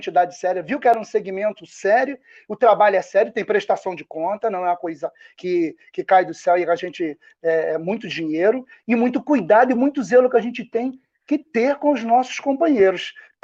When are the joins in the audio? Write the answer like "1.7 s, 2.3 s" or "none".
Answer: none

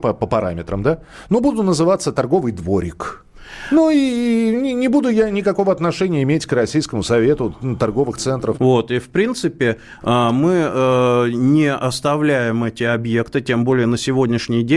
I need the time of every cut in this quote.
8.5 s

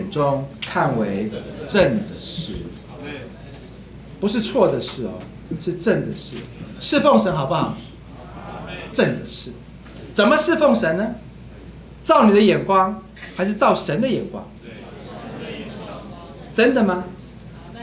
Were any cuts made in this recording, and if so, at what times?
8.9 s

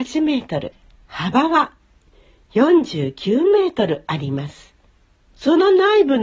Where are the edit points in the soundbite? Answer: 5.3 s

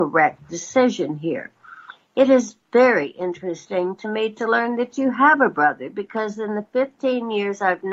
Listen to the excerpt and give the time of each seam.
none

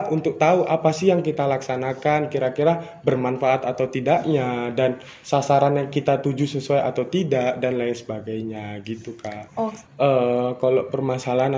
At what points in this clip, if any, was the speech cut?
9.8 s

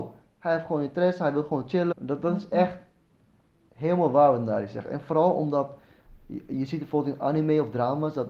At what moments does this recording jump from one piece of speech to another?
1.9 s

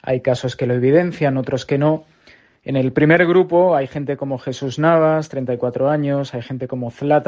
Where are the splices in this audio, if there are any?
none

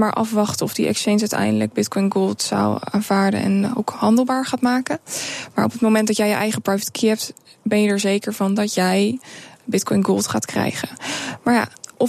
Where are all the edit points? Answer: none

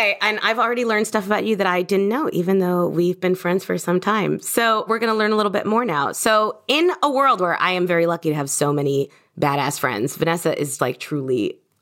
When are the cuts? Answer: 10.8 s

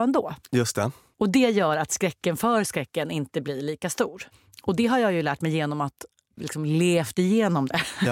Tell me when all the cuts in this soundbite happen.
none

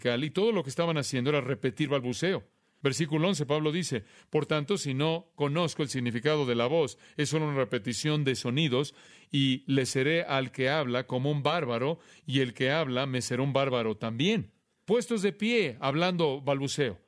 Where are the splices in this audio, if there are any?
none

